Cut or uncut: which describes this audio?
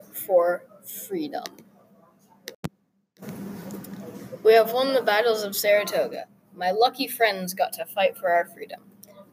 uncut